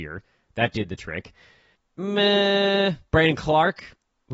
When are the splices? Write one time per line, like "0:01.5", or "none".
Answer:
0:01.8